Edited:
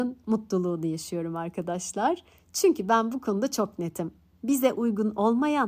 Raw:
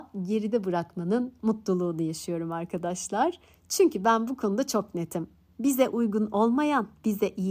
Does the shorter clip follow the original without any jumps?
yes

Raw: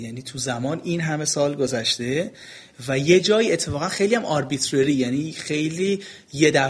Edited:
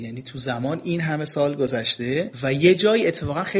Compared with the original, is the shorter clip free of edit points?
no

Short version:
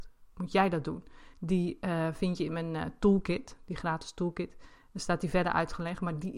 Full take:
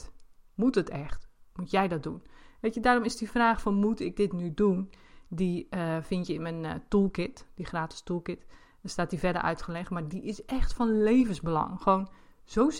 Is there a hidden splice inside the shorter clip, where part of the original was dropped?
yes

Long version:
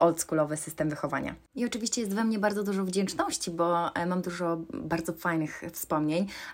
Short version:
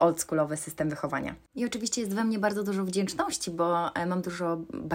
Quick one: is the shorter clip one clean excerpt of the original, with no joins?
yes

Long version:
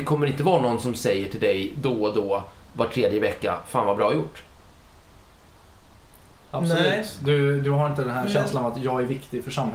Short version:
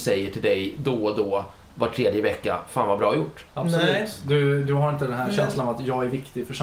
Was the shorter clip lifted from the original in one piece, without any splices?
no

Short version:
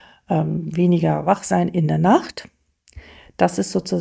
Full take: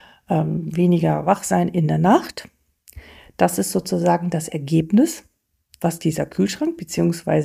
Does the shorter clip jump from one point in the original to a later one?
no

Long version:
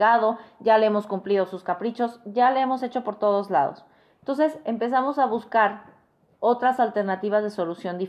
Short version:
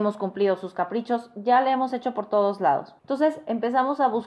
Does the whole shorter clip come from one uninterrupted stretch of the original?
no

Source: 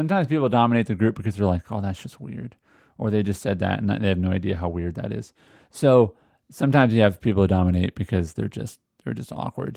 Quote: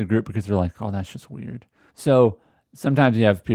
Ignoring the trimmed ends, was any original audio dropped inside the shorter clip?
yes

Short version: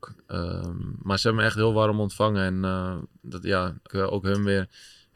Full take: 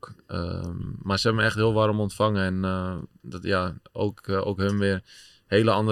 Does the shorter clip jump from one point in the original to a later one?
yes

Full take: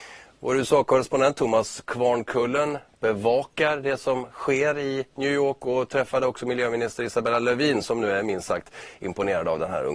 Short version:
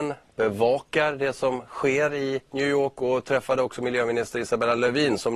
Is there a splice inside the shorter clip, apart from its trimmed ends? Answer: no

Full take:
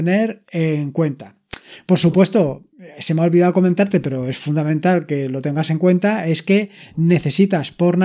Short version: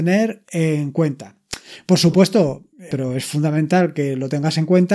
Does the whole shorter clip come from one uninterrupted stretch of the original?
no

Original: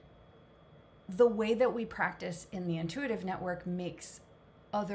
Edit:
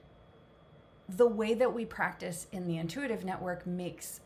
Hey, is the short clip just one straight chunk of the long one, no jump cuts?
yes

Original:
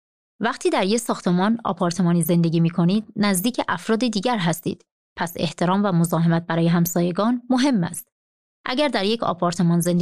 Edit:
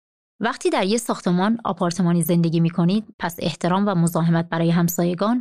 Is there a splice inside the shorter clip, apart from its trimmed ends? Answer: yes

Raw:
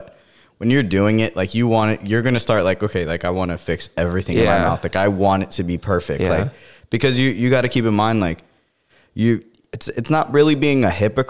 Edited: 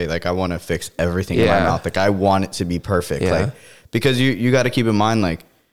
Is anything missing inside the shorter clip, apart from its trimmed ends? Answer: no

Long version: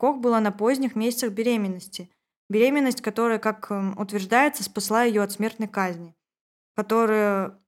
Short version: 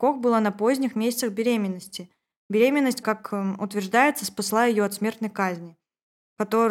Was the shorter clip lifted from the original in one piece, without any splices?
no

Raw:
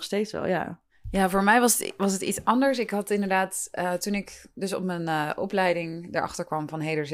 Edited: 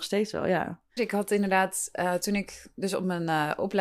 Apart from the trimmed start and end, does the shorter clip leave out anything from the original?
yes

